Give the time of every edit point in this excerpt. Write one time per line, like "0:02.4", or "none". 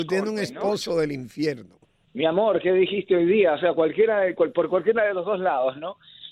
0:02.0